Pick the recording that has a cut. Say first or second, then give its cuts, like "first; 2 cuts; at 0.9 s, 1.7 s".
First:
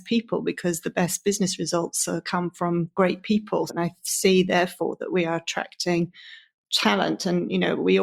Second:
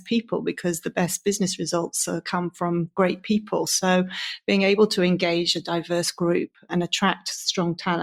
first; 1 cut; at 3.7 s